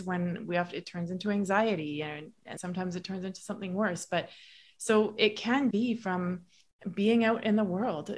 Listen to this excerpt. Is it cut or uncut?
cut